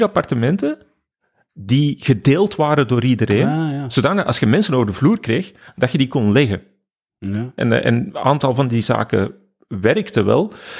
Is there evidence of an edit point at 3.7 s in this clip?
no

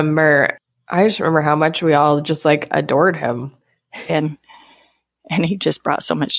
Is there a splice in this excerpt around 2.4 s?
no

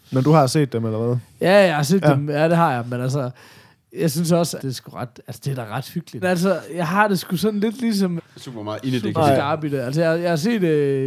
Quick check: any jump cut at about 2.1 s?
no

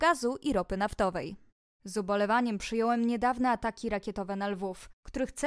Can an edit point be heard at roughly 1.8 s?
yes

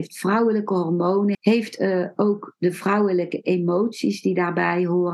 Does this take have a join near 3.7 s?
no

